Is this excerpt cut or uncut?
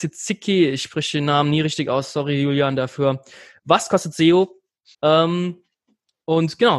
cut